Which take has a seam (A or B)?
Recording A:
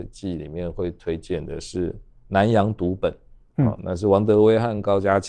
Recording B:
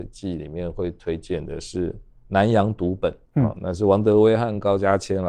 B